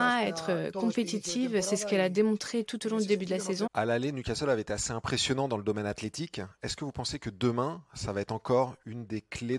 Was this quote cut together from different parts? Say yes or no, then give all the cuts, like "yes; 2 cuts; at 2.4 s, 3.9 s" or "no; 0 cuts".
yes; 1 cut; at 3.7 s